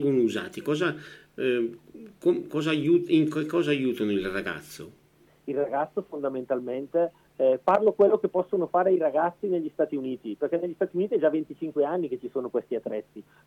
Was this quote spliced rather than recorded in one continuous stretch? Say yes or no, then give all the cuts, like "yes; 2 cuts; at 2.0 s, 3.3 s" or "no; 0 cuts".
no; 0 cuts